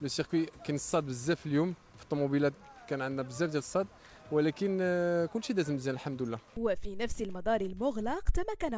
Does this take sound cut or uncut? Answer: uncut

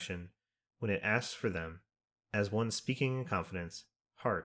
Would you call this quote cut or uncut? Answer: cut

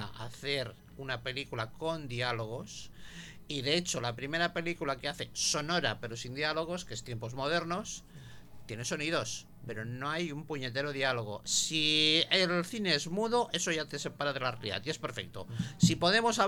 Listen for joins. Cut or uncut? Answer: cut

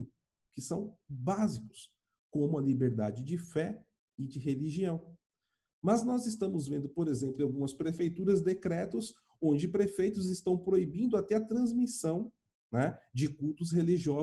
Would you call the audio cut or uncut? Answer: cut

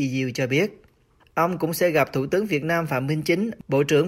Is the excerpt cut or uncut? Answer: cut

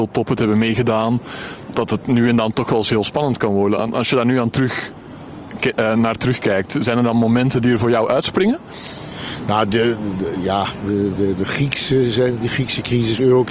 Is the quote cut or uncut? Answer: uncut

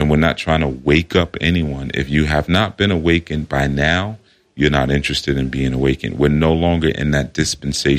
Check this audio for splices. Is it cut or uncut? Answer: uncut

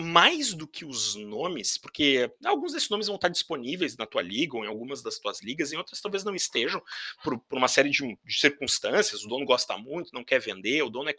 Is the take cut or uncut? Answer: uncut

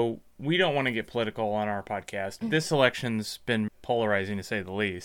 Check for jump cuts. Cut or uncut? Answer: cut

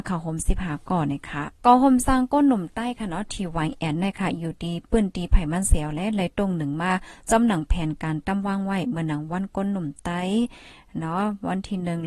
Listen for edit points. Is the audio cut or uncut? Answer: cut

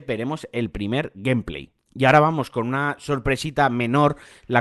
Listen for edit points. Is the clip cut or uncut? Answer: uncut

